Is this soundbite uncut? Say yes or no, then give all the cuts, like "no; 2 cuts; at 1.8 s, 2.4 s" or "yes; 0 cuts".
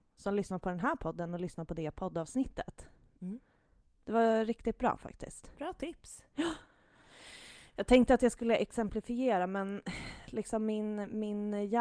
yes; 0 cuts